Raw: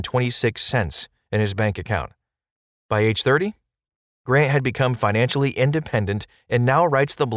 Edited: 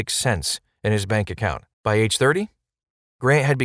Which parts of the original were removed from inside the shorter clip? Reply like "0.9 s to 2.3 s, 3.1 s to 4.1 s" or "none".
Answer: 2.2 s to 2.8 s